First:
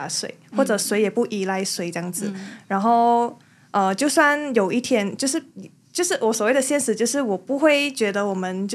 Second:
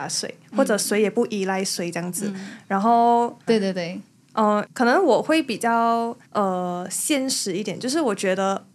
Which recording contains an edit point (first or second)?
second